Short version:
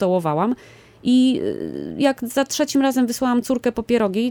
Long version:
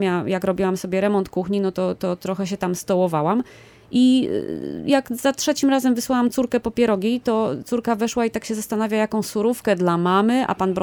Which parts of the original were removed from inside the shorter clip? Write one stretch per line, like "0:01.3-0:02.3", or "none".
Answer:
none